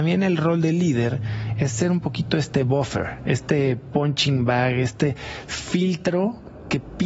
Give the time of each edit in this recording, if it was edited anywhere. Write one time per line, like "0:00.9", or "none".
none